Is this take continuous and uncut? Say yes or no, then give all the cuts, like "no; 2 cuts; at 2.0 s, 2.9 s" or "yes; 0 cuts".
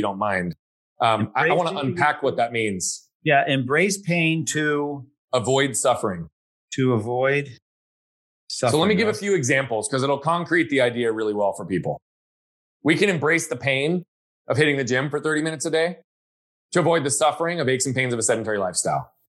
yes; 0 cuts